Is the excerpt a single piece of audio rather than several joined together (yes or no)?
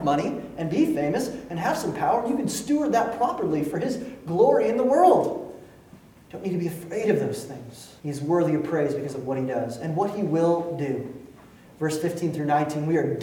no